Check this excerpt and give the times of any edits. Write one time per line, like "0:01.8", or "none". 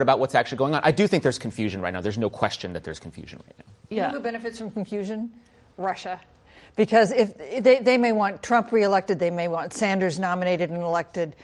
none